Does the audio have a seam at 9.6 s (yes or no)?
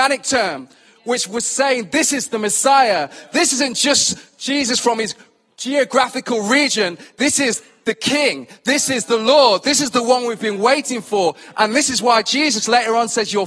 no